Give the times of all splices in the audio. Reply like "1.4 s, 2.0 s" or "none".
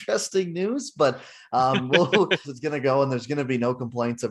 2.4 s